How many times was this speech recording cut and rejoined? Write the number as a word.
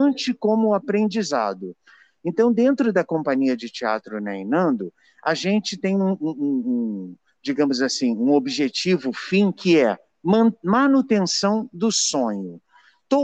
zero